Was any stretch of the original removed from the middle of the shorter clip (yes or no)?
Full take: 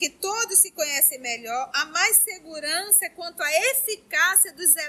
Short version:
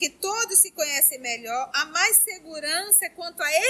no